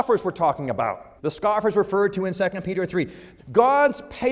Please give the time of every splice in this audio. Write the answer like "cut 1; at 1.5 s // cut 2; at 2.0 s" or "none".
cut 1; at 1.2 s // cut 2; at 3.4 s